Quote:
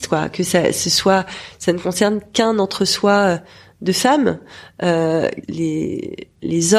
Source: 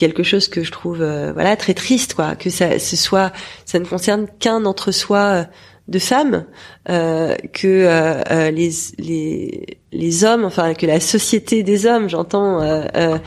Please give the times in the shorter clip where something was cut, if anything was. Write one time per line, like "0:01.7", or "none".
0:05.4